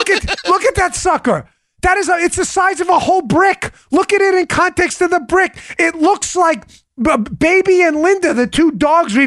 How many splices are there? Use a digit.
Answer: 0